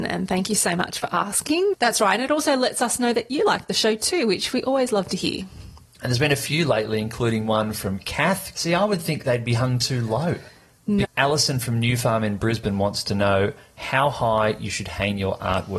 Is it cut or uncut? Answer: cut